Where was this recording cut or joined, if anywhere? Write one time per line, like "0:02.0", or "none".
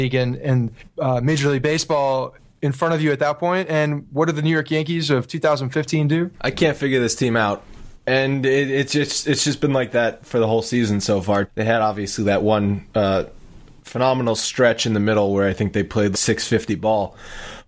0:06.3
0:11.5
0:16.1